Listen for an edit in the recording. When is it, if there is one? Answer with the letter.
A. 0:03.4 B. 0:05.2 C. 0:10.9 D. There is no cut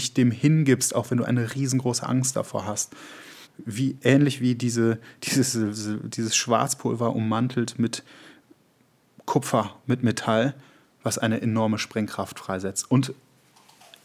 A